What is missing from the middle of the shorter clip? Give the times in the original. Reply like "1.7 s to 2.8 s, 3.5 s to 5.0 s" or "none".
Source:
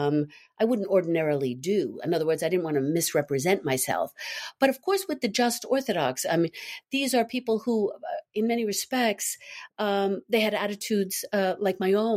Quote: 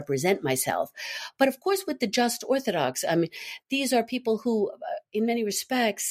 none